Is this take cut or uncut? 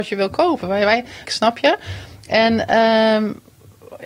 cut